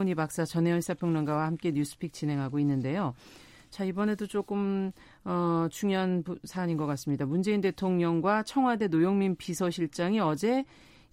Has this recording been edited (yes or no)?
no